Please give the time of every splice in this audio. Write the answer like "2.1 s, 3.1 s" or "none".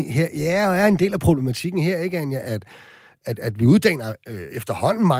none